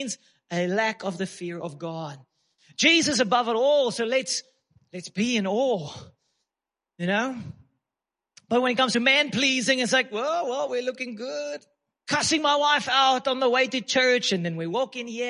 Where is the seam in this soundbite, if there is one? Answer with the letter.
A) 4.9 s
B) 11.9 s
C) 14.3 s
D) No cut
B